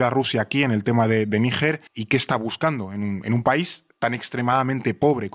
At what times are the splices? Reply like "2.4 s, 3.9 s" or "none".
1.9 s